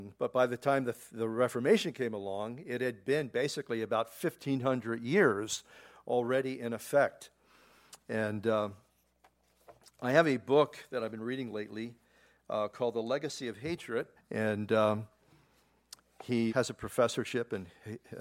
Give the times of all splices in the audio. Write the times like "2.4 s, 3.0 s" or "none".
14.2 s, 16.5 s